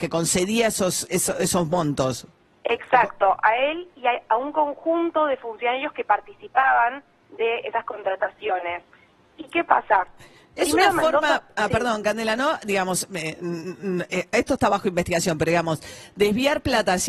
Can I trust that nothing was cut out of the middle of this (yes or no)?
yes